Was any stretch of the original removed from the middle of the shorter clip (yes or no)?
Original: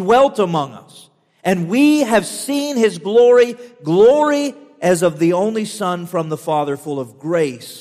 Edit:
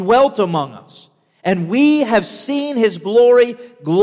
no